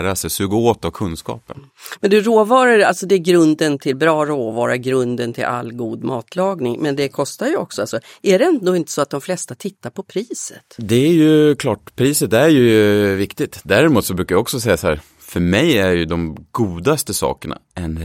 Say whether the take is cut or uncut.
uncut